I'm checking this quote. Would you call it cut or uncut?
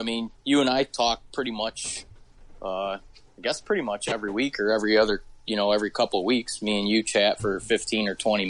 uncut